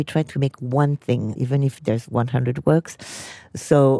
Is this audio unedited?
yes; 0 cuts

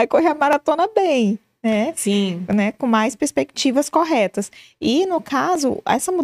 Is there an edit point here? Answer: no; 0 cuts

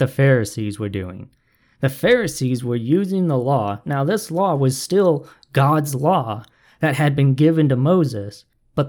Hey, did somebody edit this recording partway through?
no; 0 cuts

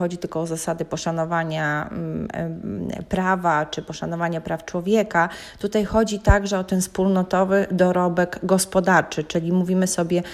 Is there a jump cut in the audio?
no; 0 cuts

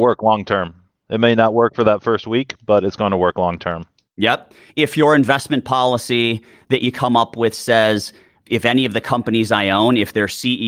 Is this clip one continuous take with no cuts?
yes; 0 cuts

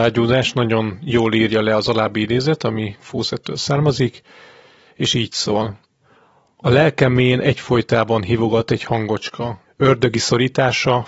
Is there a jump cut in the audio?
yes; 1 cut; at 9.6 s

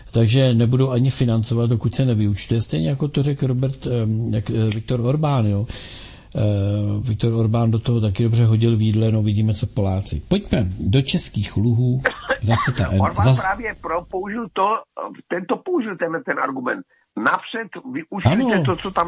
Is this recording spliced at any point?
no; 0 cuts

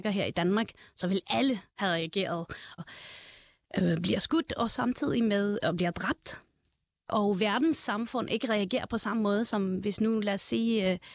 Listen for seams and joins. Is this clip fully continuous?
no; 2 cuts; at 1.7 s, 2.8 s

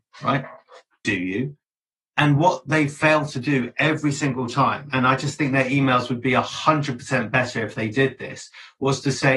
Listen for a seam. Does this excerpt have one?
no; 0 cuts

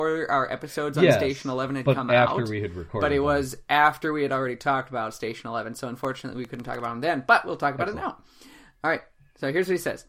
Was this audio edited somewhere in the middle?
no; 0 cuts

